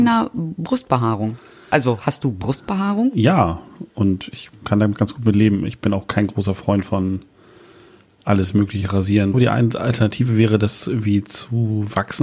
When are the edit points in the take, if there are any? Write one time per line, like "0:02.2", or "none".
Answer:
0:09.3